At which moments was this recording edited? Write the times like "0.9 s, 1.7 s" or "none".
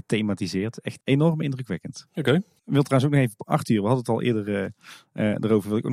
1.0 s, 2.6 s